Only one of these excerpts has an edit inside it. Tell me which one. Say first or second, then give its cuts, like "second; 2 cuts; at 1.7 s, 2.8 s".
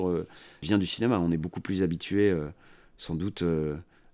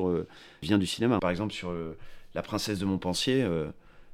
second; 1 cut; at 1.2 s